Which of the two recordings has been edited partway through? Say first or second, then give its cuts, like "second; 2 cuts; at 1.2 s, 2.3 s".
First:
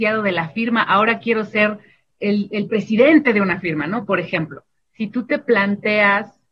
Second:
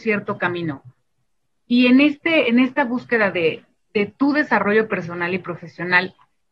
first; 1 cut; at 4.8 s